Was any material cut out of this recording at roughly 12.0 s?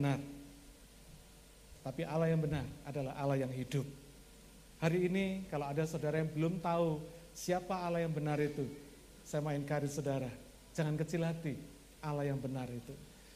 yes; 1 cut; at 12.0 s

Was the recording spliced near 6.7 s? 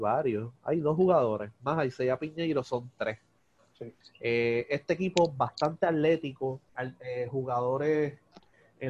yes; 2 cuts; at 4.0 s, 6.7 s

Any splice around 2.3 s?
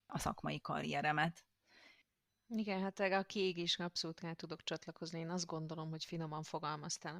no; 0 cuts

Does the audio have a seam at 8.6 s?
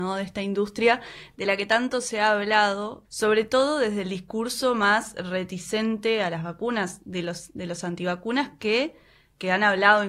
no; 0 cuts

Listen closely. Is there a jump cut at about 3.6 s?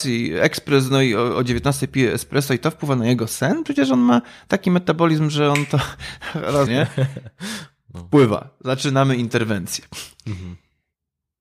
no; 1 cut; at 6.7 s

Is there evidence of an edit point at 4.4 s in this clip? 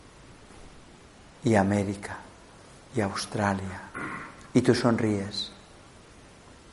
yes; 1 cut; at 4.4 s

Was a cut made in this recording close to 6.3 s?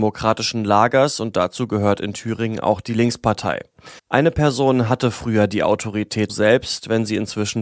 yes; 2 cuts; at 4.0 s, 6.3 s

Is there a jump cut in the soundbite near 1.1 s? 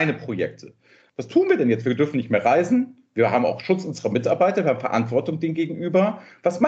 yes; 1 cut; at 1.1 s

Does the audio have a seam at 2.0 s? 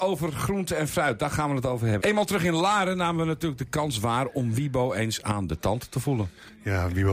yes; 1 cut; at 2.0 s

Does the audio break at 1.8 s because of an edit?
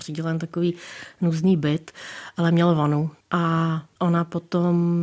no; 1 cut; at 3.2 s

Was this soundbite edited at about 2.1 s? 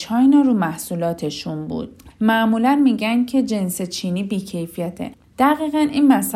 yes; 2 cuts; at 2.1 s, 5.3 s

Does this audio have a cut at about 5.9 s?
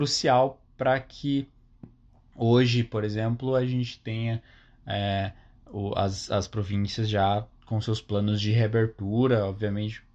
no; 0 cuts

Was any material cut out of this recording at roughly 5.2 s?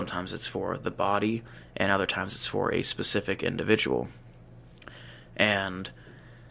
no; 0 cuts

